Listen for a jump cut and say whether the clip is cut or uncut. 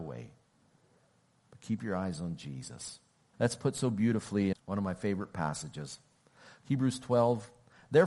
cut